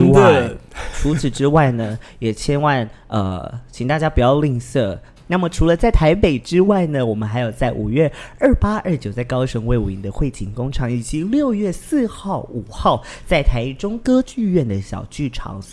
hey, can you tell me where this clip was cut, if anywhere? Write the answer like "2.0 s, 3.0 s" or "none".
5.2 s